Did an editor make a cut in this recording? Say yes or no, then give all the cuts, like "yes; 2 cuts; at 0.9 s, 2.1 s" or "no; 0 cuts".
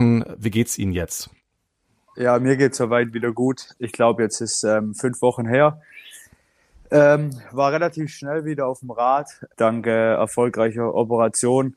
no; 0 cuts